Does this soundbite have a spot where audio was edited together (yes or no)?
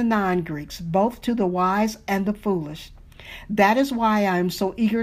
no